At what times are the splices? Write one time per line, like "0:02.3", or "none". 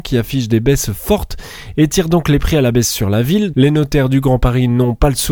0:03.5

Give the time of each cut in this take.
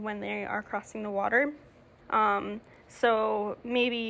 0:02.0

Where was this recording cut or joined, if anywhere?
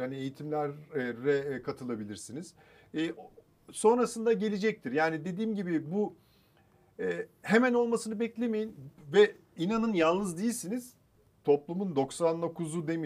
none

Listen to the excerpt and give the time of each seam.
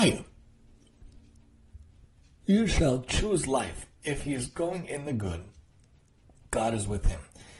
0:04.0

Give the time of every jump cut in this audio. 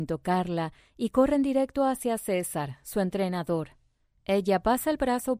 0:04.1

